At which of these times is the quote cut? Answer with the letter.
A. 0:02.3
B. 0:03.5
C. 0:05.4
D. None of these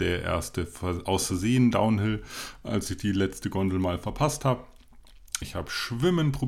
C